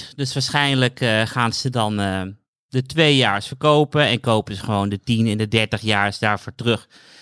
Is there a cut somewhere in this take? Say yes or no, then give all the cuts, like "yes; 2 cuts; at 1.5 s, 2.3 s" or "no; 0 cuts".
no; 0 cuts